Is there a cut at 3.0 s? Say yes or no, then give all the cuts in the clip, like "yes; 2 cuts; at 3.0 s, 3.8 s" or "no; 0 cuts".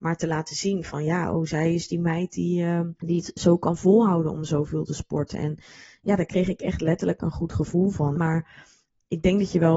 yes; 2 cuts; at 3.0 s, 8.1 s